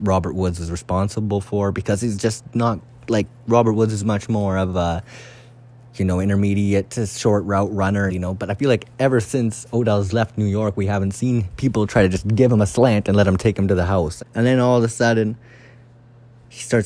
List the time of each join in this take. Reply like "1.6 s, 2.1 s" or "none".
8.1 s, 14.2 s